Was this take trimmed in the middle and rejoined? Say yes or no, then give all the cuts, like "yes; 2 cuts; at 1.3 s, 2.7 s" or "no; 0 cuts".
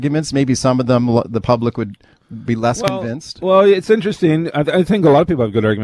no; 0 cuts